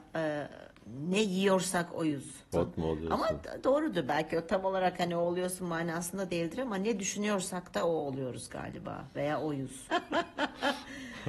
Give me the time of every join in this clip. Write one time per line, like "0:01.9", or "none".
0:02.5
0:09.9